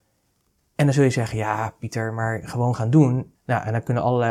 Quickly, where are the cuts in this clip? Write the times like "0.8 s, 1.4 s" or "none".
3.3 s